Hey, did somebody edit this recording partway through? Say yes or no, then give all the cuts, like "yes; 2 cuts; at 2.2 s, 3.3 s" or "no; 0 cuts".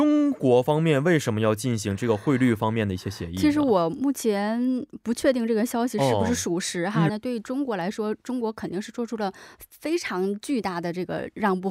yes; 1 cut; at 7.1 s